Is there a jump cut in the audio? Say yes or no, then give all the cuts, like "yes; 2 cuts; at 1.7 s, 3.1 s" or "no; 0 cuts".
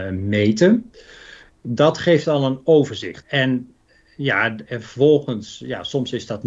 yes; 2 cuts; at 1.5 s, 3.2 s